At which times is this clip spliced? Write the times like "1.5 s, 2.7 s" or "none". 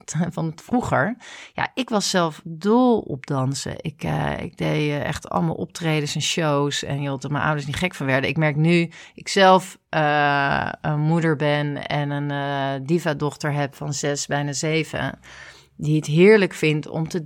none